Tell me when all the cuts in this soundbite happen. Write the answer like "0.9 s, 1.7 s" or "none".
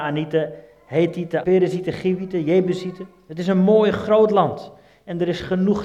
1.4 s